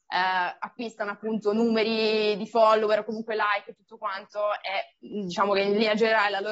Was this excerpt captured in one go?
yes; 0 cuts

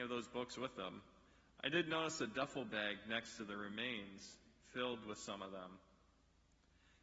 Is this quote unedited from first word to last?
yes; 0 cuts

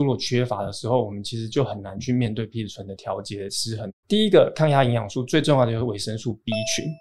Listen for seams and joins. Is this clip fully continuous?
no; 1 cut; at 4.0 s

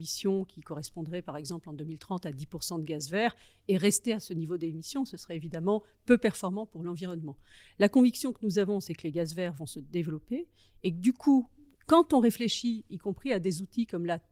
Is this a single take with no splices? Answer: yes; 0 cuts

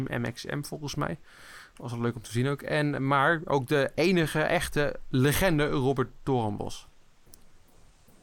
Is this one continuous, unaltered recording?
yes; 0 cuts

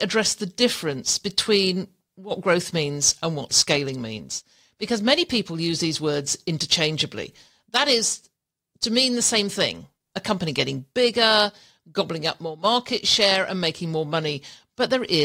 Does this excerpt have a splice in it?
no; 0 cuts

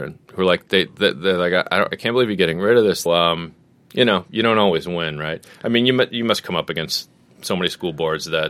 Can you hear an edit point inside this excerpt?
yes; 1 cut; at 3.1 s

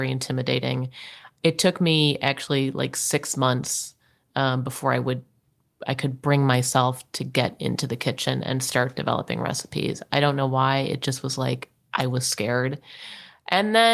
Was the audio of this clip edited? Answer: no; 0 cuts

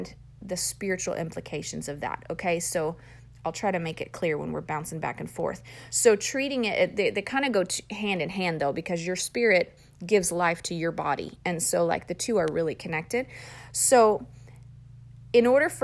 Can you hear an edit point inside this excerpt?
no; 0 cuts

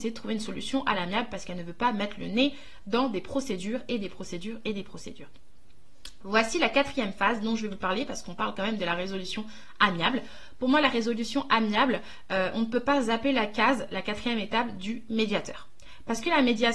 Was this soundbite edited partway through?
no; 0 cuts

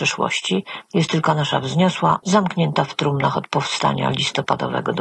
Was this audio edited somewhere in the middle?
yes; 1 cut; at 2.2 s

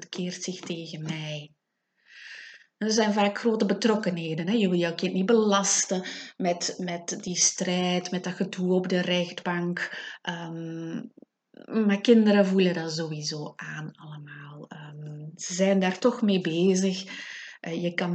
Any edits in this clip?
no; 0 cuts

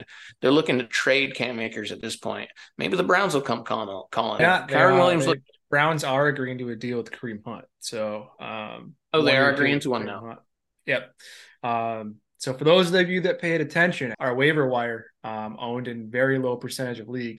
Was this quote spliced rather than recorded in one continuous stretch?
yes; 3 cuts; at 4.4 s, 14.1 s, 15.2 s

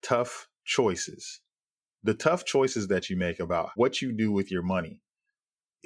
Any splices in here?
no; 0 cuts

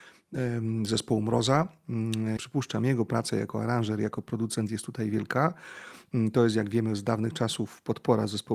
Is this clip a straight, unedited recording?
no; 1 cut; at 2.4 s

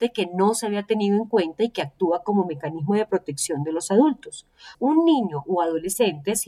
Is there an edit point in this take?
yes; 1 cut; at 4.7 s

